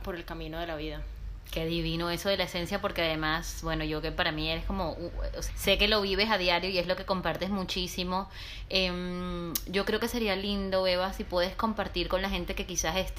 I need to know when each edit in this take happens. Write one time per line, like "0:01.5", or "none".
0:05.5